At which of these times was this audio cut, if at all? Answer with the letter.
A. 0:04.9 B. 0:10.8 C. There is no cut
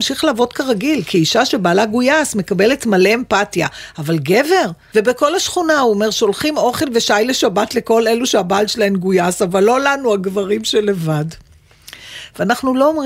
A